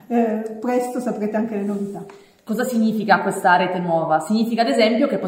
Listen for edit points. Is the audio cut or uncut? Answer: uncut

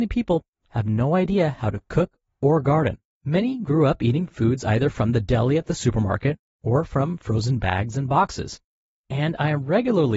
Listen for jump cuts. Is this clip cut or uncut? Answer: cut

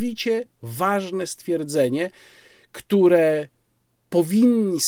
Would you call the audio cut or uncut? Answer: uncut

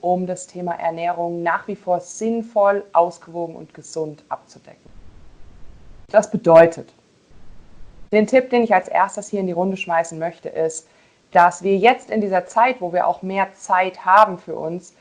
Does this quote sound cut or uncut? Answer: uncut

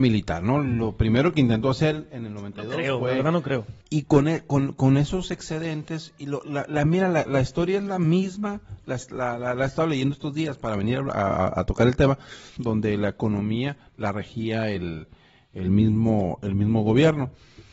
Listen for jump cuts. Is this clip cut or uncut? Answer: cut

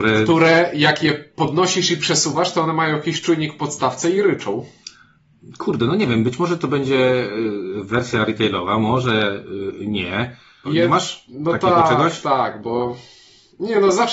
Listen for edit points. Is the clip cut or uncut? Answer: cut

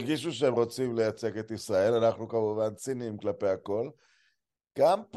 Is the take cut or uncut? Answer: uncut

